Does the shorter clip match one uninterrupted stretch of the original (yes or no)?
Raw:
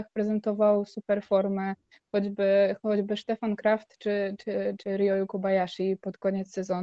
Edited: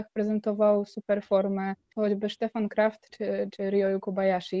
no